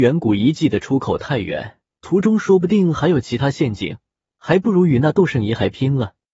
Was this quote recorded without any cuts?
no; 2 cuts; at 1.9 s, 4.3 s

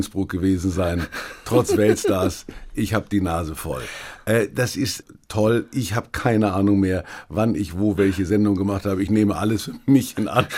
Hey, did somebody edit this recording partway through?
no; 0 cuts

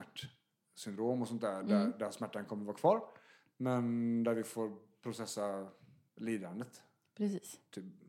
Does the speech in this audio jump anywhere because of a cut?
no; 0 cuts

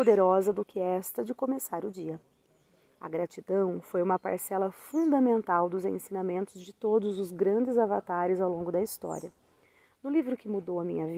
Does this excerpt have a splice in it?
no; 0 cuts

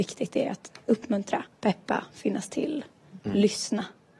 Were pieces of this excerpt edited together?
yes; 1 cut; at 1.5 s

